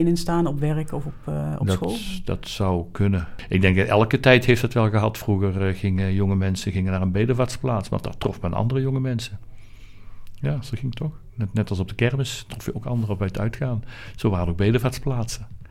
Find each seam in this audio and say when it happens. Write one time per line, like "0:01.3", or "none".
none